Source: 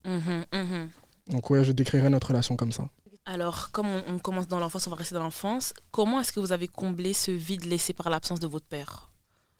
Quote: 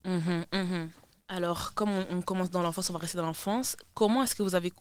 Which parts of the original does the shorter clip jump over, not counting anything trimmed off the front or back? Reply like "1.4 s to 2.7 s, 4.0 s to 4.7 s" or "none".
1.2 s to 3.2 s

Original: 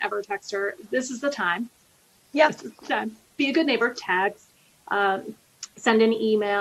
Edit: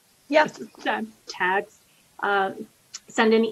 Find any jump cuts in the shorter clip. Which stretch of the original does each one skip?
3.3 s to 4.0 s

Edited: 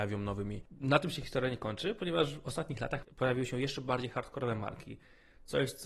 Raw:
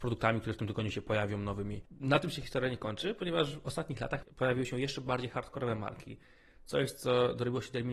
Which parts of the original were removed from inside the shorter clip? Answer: none

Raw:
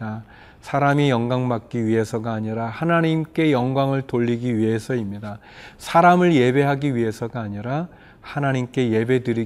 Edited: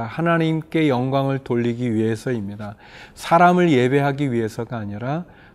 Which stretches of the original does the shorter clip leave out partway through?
none

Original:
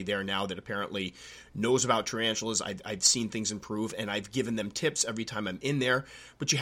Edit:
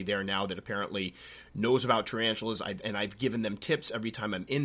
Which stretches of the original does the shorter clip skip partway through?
2.8 s to 4.0 s

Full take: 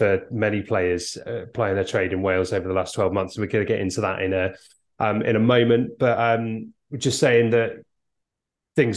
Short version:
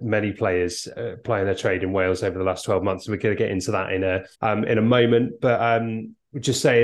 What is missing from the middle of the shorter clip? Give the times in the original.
4.6 s to 4.9 s

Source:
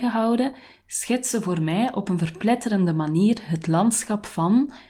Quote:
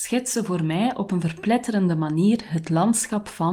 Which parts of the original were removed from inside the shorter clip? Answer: none

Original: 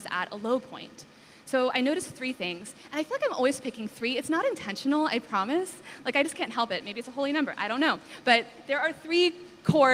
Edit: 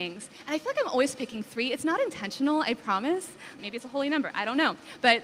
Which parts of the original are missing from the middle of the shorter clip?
6.0 s to 6.8 s

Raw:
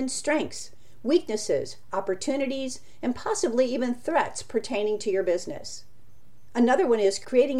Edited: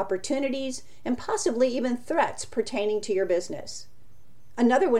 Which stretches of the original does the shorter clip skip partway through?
none

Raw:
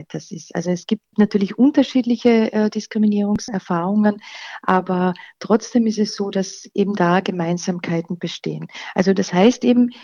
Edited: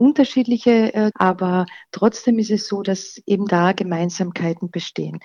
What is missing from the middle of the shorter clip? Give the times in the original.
2.7 s to 4.6 s

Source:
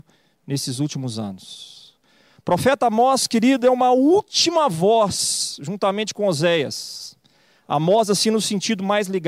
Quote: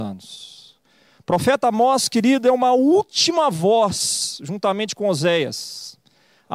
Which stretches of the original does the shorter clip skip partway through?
none

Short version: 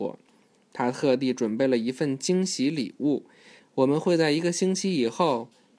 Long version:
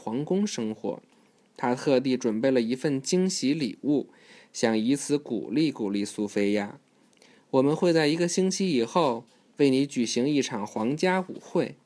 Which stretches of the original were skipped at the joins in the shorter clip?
4.4 s to 7.3 s

